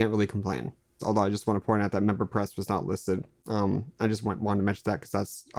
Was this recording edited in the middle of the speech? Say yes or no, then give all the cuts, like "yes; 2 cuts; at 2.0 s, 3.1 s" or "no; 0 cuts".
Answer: yes; 1 cut; at 1.0 s